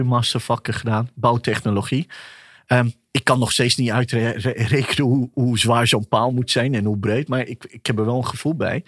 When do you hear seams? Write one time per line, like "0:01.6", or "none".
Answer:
none